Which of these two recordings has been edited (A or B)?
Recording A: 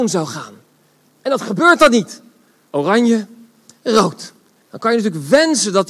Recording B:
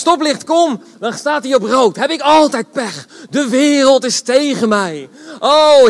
A